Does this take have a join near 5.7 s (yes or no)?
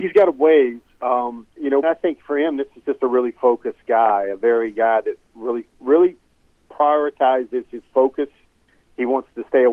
yes